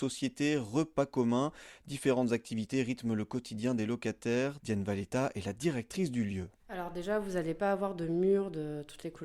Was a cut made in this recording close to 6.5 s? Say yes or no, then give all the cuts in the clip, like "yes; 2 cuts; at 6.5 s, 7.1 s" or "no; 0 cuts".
no; 1 cut; at 4.6 s